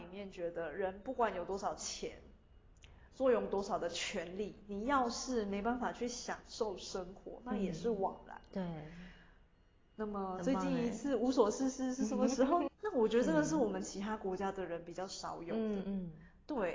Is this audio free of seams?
no; 1 cut; at 12.7 s

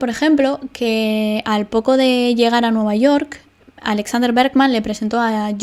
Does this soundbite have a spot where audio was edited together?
no; 0 cuts

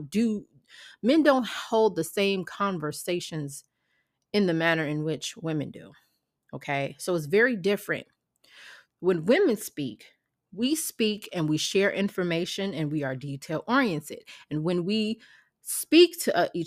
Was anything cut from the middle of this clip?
yes; 1 cut; at 8.9 s

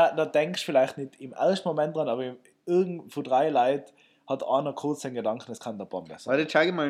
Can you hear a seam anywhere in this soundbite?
no; 0 cuts

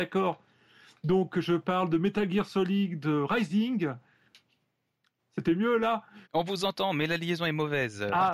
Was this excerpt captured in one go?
no; 2 cuts; at 5.2 s, 6.2 s

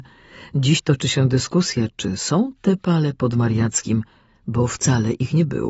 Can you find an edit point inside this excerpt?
yes; 1 cut; at 4.3 s

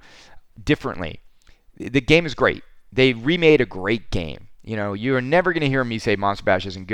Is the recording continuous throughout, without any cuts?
yes; 0 cuts

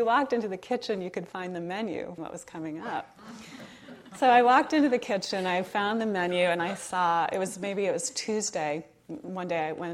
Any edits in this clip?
yes; 1 cut; at 2.2 s

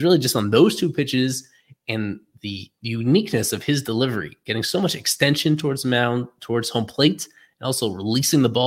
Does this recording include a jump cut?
no; 0 cuts

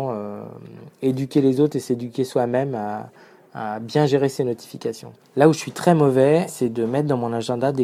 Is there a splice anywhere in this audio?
yes; 2 cuts; at 5.2 s, 6.5 s

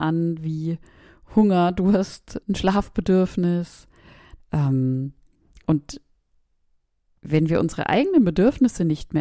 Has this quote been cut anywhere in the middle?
yes; 2 cuts; at 2.4 s, 4.4 s

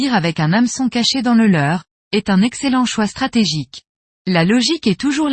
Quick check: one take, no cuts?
no; 1 cut; at 4.2 s

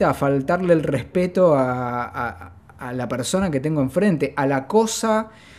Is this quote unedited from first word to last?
yes; 0 cuts

